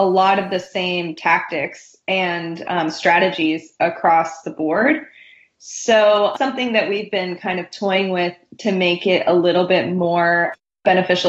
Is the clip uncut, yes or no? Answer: yes